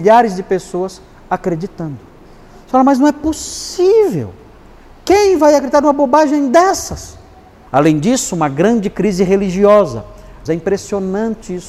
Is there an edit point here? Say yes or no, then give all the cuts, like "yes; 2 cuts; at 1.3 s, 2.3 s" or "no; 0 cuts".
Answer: yes; 2 cuts; at 7.7 s, 10.5 s